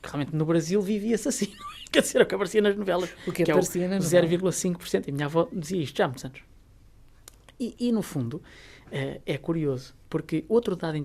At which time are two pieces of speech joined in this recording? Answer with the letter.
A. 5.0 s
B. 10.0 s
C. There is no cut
B